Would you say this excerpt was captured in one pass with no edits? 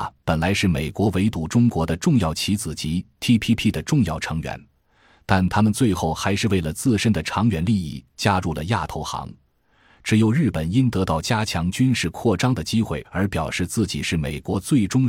yes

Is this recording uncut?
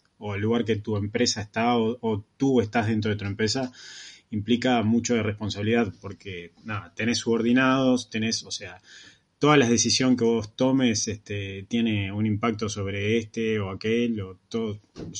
yes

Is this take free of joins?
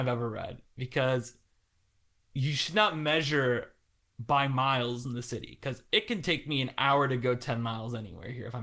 yes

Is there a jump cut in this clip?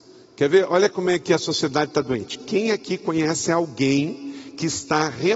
no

